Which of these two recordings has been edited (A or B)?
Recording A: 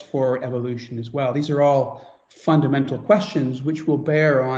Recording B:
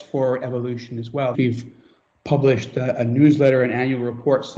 B